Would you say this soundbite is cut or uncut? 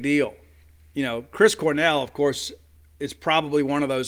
uncut